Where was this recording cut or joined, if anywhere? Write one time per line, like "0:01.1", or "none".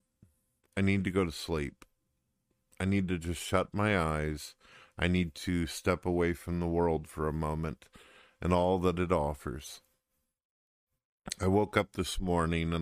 none